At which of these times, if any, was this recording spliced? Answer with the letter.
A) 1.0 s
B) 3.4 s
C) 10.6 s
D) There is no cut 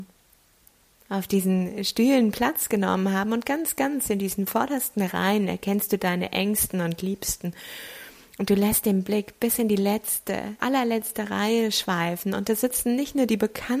C